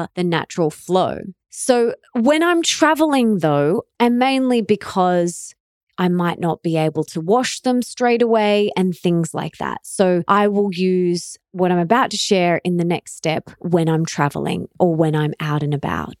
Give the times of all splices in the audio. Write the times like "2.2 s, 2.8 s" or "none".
3.9 s